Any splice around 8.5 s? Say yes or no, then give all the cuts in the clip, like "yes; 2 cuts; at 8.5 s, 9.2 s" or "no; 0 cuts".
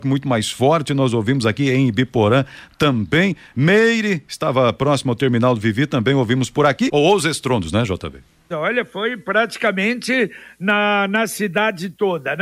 yes; 2 cuts; at 6.9 s, 8.5 s